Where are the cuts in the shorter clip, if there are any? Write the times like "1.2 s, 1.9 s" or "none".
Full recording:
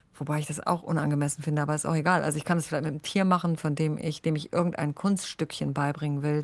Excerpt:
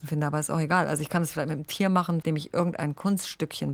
2.2 s